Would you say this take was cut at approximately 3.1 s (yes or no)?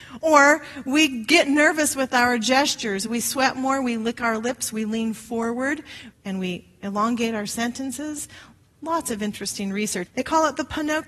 no